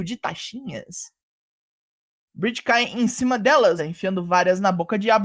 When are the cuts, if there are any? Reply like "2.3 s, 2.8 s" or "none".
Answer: 3.8 s